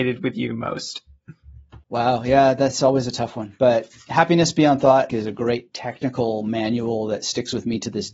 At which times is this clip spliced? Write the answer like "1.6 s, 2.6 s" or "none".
5.1 s